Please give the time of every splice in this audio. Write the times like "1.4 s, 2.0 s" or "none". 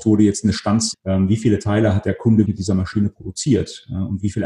0.9 s, 2.4 s